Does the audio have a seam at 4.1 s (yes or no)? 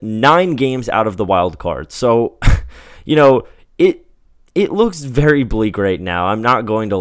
no